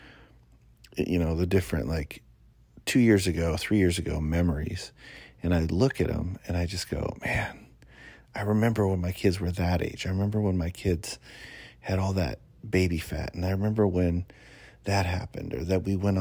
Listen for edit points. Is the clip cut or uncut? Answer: uncut